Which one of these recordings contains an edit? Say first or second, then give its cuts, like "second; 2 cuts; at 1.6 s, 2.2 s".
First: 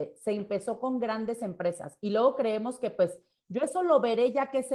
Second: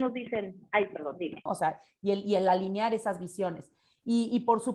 second; 1 cut; at 1.5 s